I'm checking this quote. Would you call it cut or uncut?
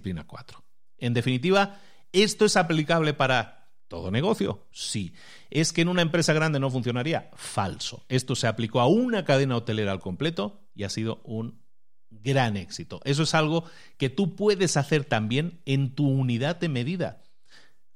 uncut